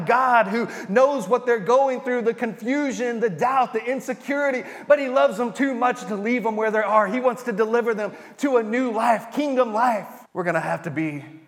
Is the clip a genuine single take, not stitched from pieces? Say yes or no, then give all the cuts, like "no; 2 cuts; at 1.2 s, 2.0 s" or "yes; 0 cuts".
no; 1 cut; at 10.3 s